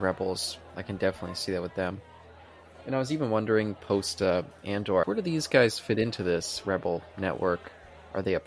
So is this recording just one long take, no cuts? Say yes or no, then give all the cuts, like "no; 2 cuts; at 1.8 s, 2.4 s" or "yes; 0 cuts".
no; 1 cut; at 5.0 s